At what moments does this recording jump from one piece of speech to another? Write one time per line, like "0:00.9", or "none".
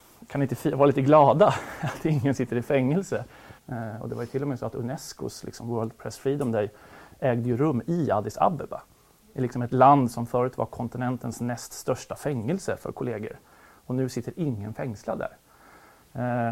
0:03.6

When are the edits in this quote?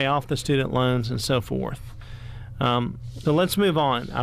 0:03.2

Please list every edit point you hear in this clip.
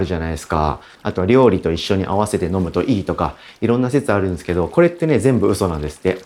0:01.0

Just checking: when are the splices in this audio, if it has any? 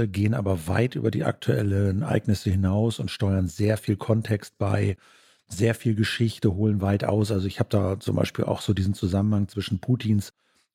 none

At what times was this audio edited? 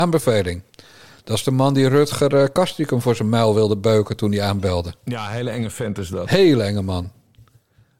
none

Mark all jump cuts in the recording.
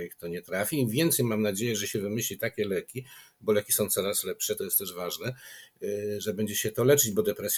none

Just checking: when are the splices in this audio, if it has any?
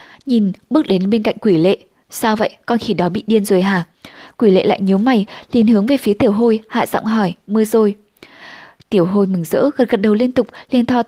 none

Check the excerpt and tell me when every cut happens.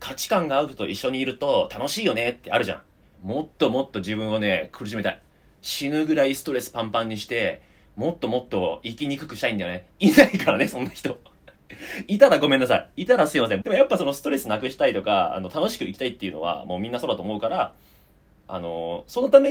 0:03.1
0:13.6

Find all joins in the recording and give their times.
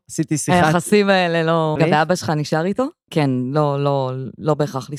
0:01.8
0:03.1

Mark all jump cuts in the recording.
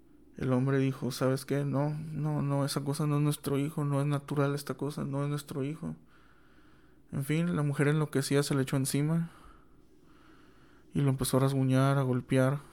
none

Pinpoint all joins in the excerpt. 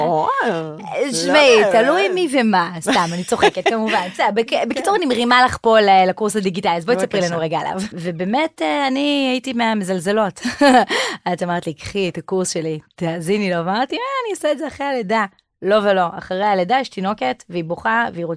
0:07.9

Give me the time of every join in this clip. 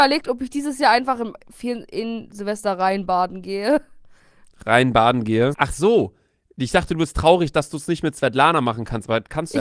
0:05.5

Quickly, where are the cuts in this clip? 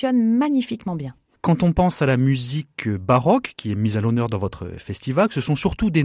none

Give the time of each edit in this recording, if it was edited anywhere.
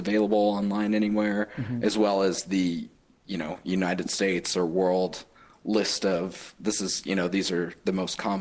none

